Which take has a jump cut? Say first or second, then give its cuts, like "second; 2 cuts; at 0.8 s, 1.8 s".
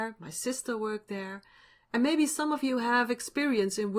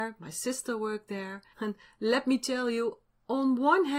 second; 1 cut; at 1.5 s